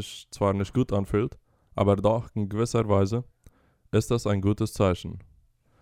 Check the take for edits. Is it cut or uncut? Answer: uncut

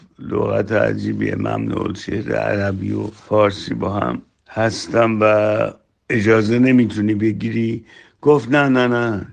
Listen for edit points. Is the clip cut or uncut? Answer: uncut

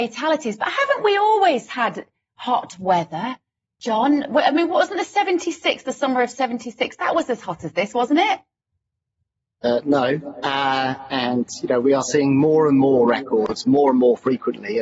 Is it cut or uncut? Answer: uncut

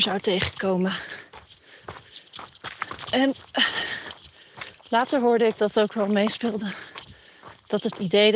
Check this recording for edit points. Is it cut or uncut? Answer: uncut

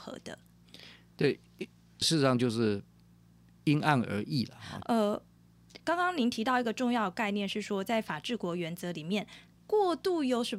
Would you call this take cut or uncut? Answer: cut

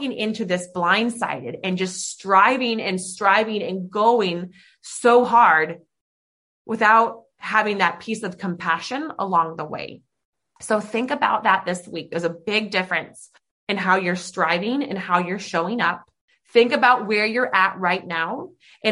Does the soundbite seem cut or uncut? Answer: uncut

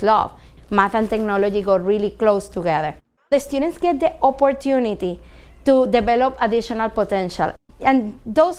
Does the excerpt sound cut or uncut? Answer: uncut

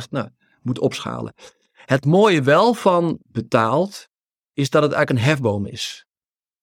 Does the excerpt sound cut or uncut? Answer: cut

